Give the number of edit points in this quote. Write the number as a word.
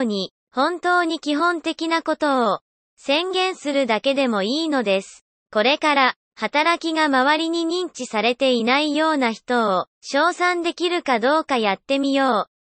two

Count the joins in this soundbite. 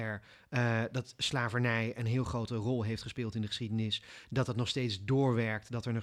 zero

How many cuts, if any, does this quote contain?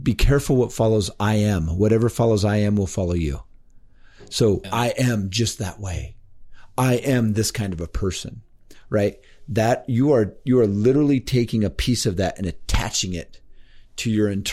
one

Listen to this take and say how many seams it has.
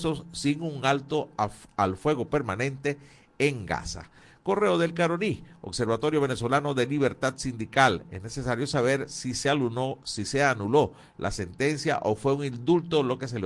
zero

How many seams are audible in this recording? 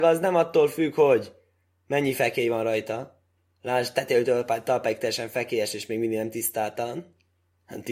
zero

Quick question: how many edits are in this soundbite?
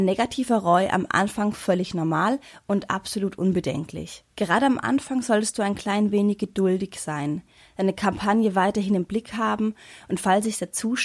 one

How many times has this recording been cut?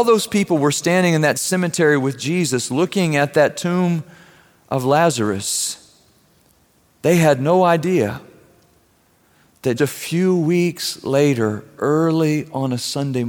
one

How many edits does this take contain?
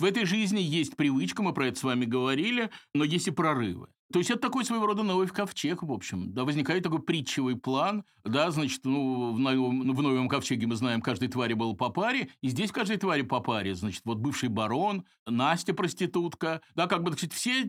two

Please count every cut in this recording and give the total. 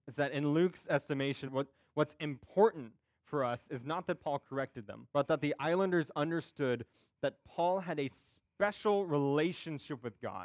two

